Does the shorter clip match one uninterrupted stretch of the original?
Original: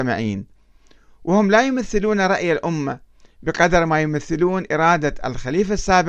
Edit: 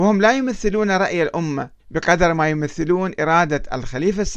no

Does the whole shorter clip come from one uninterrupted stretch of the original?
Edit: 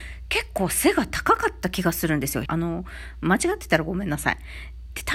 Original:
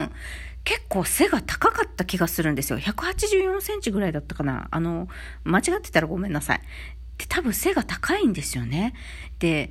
no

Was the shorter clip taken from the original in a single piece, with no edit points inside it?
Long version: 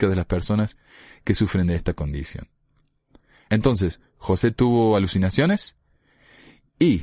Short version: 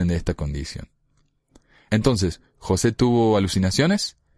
yes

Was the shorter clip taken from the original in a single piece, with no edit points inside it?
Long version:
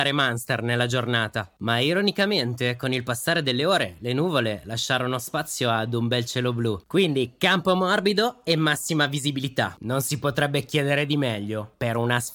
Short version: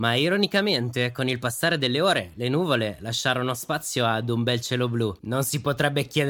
no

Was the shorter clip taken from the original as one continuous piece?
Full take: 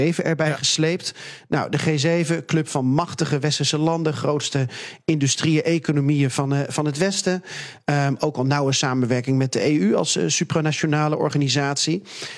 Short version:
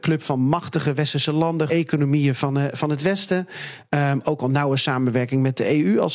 no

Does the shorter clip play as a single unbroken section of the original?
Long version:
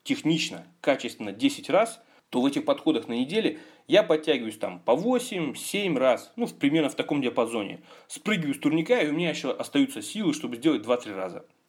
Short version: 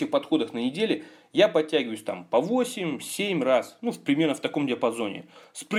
yes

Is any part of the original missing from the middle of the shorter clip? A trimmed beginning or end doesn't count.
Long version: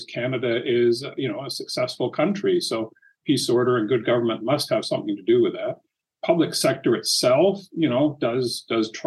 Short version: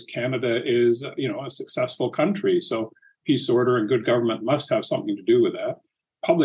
no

